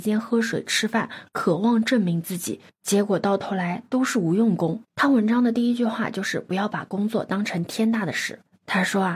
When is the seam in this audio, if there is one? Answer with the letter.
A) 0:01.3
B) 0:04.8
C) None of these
B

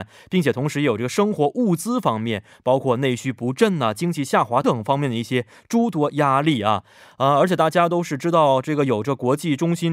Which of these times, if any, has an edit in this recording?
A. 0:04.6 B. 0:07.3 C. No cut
A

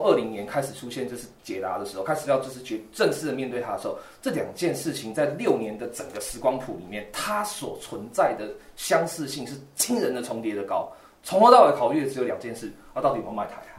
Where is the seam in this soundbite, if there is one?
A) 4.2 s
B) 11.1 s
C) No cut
C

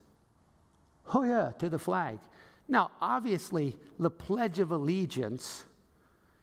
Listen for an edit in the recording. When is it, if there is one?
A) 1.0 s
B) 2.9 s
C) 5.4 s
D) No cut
D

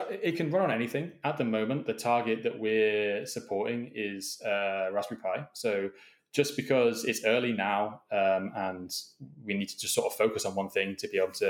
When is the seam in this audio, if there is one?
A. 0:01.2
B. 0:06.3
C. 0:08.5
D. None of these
D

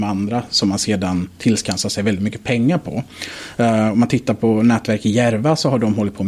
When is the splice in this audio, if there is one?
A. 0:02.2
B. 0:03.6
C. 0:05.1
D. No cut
D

